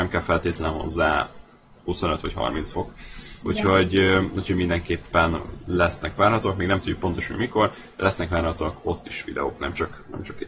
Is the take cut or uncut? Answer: uncut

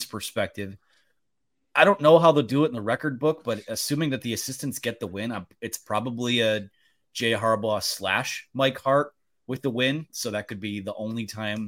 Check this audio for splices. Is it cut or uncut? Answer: uncut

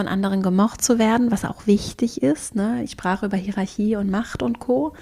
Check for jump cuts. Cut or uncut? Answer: uncut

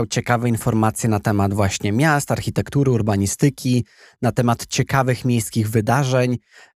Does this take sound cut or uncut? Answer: uncut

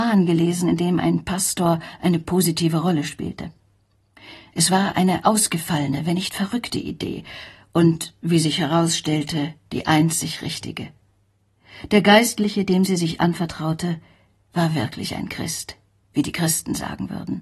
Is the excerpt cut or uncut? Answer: uncut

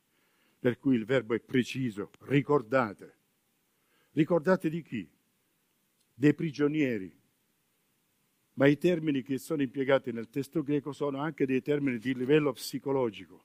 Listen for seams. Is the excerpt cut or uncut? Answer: cut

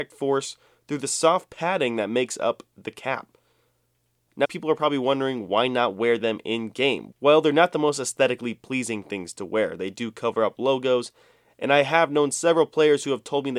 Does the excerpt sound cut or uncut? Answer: cut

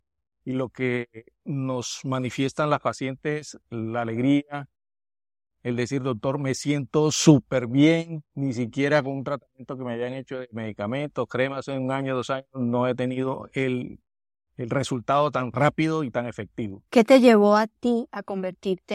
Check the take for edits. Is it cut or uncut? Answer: cut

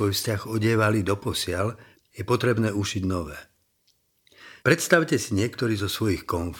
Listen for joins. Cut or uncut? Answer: cut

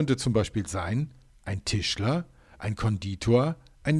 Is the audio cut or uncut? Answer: uncut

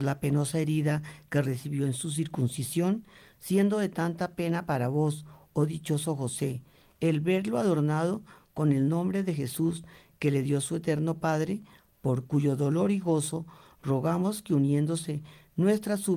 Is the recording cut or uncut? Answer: cut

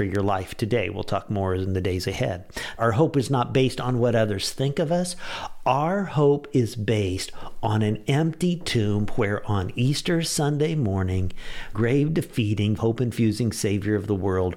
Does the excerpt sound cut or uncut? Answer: cut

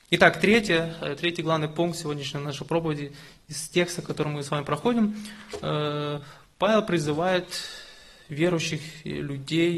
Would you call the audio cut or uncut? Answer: uncut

